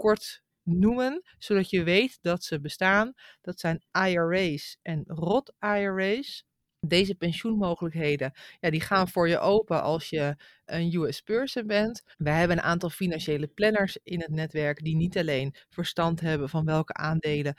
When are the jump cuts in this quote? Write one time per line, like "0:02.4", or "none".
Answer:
0:12.1